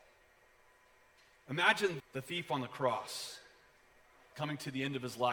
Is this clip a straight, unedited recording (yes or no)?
no